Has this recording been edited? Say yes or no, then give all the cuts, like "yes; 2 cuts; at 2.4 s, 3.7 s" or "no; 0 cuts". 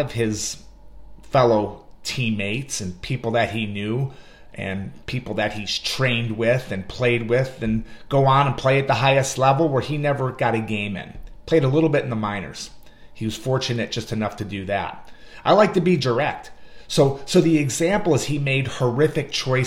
no; 0 cuts